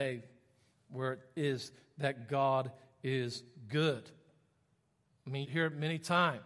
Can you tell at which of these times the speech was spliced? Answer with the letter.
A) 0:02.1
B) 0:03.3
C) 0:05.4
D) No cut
C